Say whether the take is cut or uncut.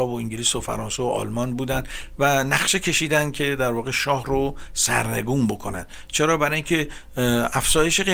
uncut